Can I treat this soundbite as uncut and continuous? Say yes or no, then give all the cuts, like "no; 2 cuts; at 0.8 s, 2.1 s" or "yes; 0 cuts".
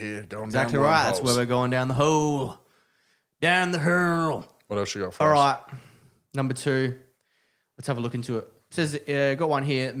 yes; 0 cuts